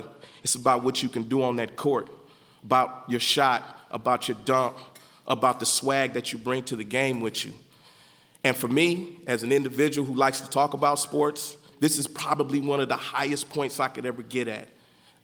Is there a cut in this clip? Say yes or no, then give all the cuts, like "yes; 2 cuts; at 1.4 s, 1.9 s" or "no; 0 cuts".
yes; 1 cut; at 11.7 s